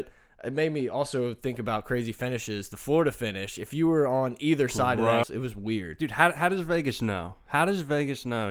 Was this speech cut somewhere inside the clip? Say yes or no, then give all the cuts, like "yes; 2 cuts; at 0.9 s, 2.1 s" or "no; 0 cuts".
yes; 1 cut; at 5.2 s